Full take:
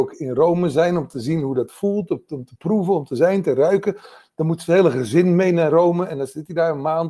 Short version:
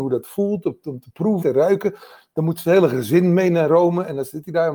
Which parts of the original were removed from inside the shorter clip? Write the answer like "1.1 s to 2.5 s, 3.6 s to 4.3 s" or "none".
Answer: 2.9 s to 3.4 s